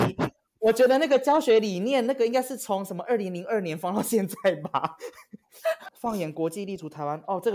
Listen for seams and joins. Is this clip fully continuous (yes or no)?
no